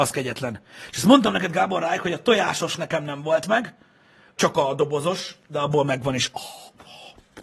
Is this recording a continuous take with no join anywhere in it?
no; 1 cut; at 4.4 s

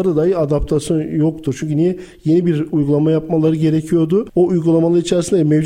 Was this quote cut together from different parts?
no; 0 cuts

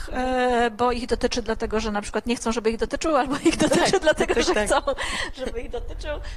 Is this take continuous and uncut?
yes; 0 cuts

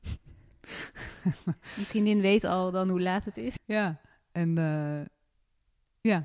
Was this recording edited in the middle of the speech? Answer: yes; 1 cut; at 3.6 s

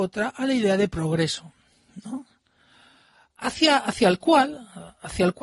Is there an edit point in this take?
no; 0 cuts

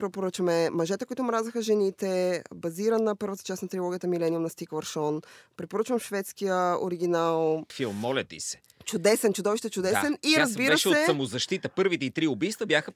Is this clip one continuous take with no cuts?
no; 1 cut; at 7.7 s

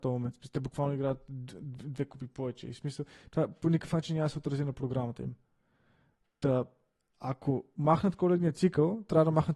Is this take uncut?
yes; 0 cuts

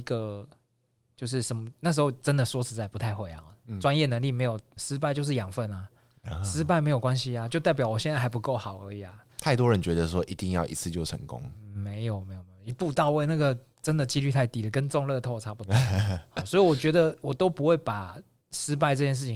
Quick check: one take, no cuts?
no; 1 cut; at 4.8 s

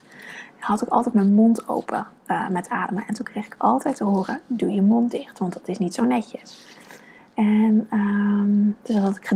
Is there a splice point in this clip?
no; 0 cuts

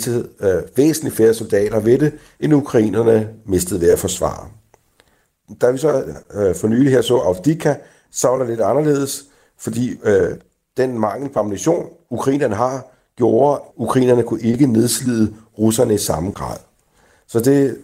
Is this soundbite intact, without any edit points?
no; 1 cut; at 13.7 s

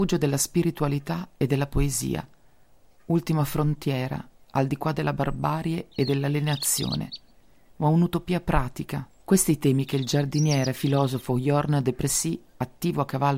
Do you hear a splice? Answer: yes; 2 cuts; at 7.7 s, 9.1 s

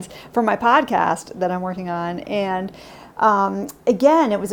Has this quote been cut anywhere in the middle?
no; 0 cuts

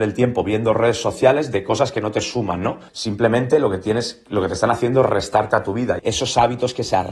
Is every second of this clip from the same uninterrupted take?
no; 2 cuts; at 2.9 s, 6.0 s

